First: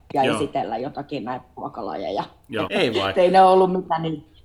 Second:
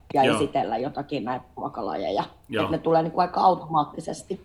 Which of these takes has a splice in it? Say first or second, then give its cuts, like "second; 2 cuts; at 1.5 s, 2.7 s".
first; 1 cut; at 2.6 s